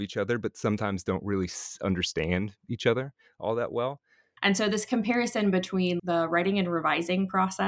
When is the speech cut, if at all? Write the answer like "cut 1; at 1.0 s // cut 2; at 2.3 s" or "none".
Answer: cut 1; at 4.4 s // cut 2; at 6.0 s